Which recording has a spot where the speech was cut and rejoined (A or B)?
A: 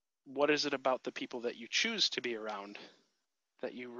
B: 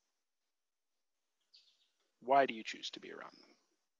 B